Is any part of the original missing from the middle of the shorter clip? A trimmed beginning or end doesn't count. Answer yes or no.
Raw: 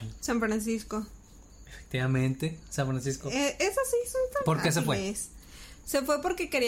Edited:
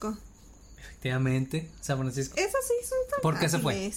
yes